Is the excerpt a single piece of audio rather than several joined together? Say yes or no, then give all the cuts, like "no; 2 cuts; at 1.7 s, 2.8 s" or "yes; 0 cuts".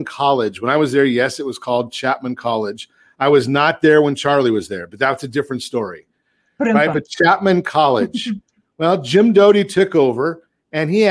yes; 0 cuts